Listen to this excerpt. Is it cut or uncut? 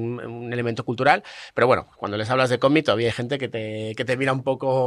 uncut